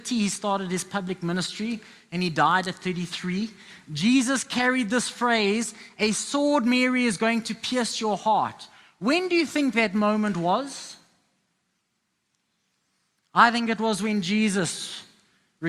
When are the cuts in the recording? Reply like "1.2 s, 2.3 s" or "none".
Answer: none

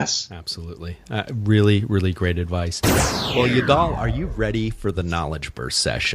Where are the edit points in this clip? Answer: none

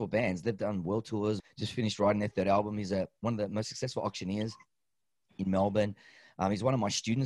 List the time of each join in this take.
1.4 s

